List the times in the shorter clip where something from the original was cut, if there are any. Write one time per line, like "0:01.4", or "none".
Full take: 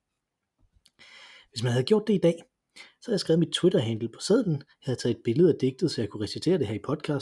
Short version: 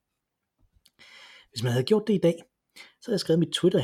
none